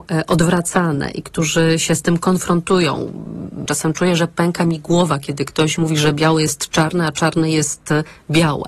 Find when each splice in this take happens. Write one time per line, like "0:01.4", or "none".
0:03.7